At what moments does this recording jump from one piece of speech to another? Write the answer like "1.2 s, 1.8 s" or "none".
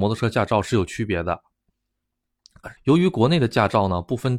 2.8 s